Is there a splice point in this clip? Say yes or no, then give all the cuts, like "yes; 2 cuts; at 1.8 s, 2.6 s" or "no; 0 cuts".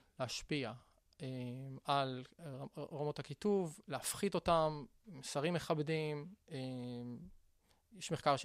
no; 0 cuts